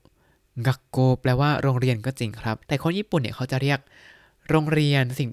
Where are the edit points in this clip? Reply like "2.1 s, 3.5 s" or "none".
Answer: 2.6 s